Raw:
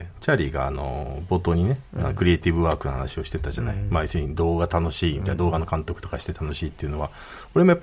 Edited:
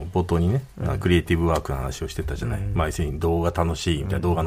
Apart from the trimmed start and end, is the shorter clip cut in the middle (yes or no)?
no